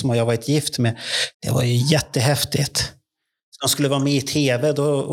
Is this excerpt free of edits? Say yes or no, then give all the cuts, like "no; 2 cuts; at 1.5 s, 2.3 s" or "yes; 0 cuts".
no; 2 cuts; at 1.3 s, 3.5 s